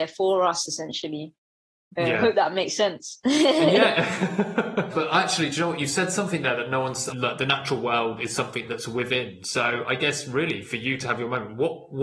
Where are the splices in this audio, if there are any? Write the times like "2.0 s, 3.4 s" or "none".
4.9 s, 7.1 s